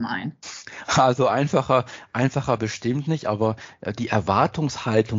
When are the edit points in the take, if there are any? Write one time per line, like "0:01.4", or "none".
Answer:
none